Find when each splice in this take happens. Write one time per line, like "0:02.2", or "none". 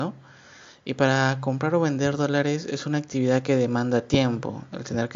none

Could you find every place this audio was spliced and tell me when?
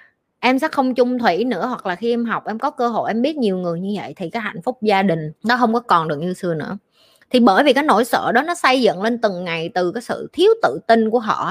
0:05.4

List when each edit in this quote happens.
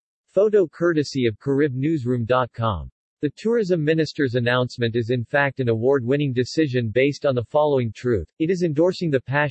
none

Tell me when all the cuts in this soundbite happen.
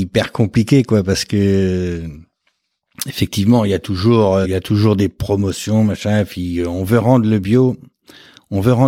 0:04.4

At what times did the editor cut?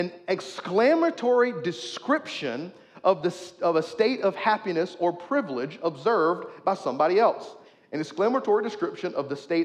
none

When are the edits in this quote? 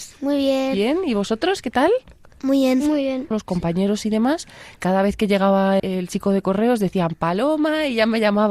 0:03.3
0:05.8

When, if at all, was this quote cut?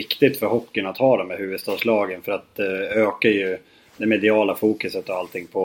none

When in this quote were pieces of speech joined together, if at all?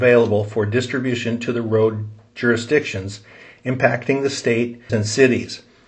0:04.9

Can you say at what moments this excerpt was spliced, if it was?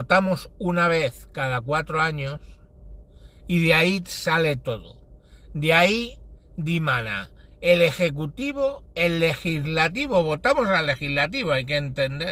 none

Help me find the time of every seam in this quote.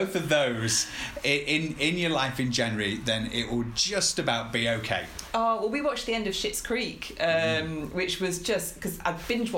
none

